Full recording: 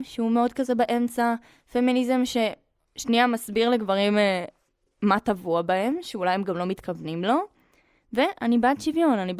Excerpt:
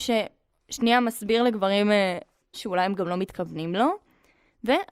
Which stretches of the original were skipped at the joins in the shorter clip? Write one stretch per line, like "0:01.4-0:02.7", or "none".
0:04.8-0:06.0